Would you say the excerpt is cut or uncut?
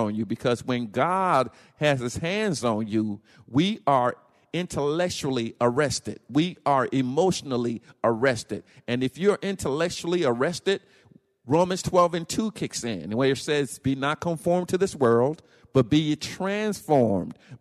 uncut